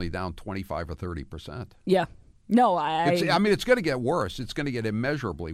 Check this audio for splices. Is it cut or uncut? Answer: uncut